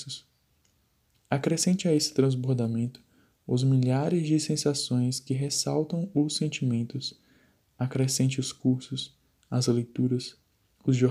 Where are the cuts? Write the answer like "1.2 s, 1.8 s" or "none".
none

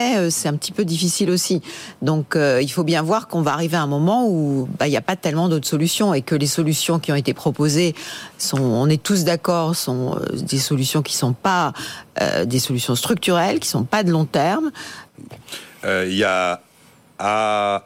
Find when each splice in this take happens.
15.1 s

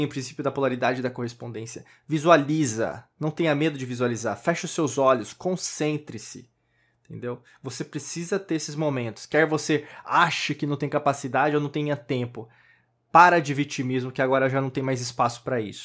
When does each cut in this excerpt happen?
none

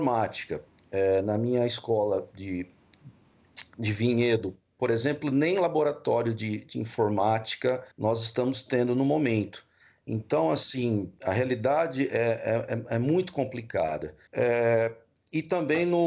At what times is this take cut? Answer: 7.9 s, 14.3 s

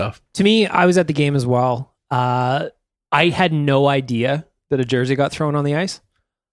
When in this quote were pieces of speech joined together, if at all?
none

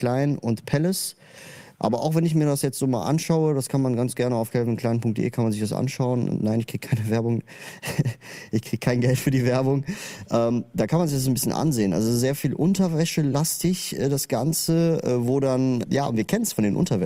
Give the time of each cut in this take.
1.8 s, 15.8 s

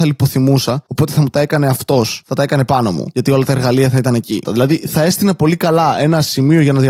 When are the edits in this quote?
2.2 s, 4.4 s

